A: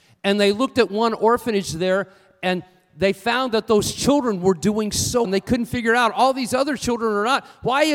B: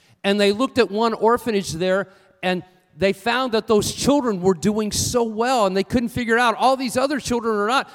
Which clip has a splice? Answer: A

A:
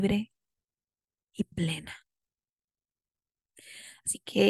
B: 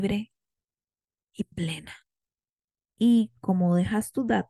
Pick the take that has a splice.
B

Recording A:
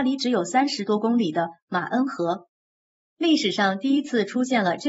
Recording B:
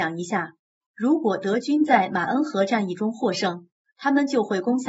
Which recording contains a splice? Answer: A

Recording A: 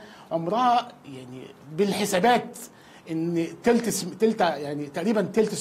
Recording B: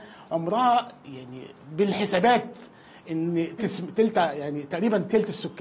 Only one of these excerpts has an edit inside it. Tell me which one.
B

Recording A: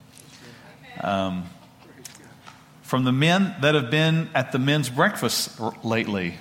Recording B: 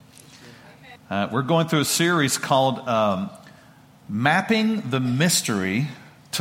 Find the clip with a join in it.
B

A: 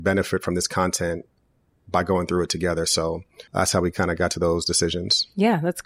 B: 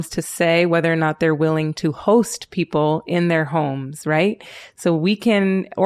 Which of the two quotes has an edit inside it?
A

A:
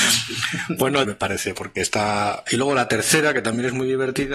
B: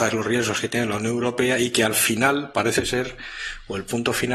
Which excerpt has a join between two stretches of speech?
A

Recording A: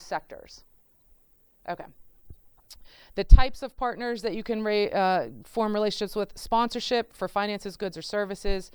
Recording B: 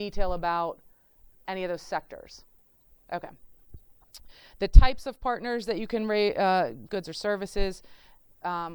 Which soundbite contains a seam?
B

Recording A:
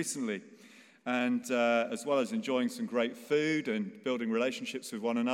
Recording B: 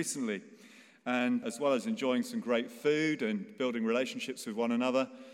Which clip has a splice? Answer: B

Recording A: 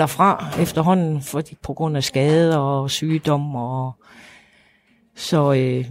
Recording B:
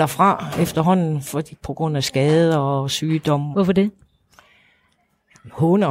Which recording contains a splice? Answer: B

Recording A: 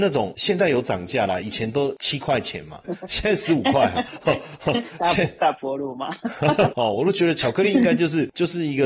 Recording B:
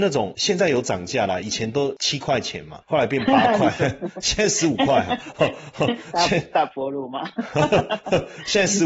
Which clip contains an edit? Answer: A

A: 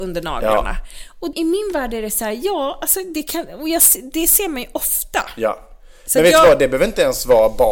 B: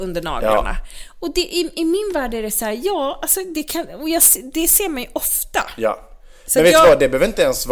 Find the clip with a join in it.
A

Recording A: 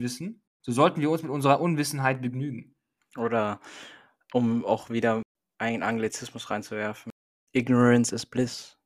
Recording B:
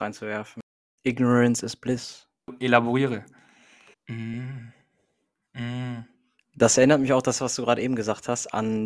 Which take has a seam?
B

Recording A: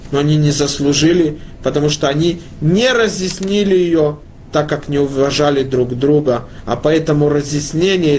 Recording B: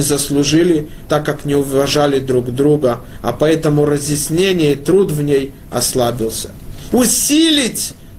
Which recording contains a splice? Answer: B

